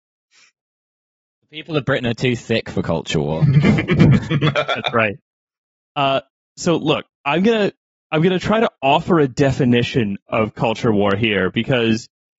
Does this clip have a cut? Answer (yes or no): no